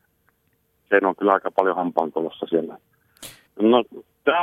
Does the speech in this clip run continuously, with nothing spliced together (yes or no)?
no